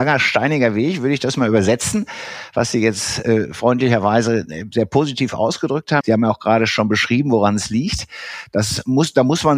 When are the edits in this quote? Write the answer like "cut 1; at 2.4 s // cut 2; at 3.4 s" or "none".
cut 1; at 6.0 s